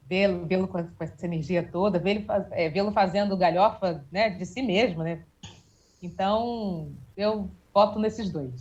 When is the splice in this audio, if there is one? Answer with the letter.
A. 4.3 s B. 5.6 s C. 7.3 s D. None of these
D